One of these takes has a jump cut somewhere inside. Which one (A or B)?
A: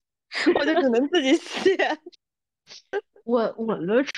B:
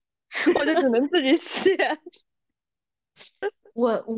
A